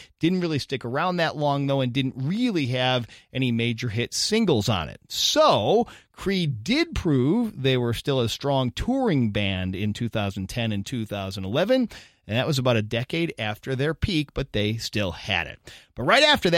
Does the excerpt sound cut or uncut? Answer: uncut